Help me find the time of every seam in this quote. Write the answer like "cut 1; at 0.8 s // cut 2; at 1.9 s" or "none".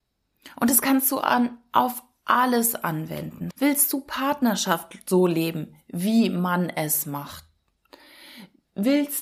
cut 1; at 3.5 s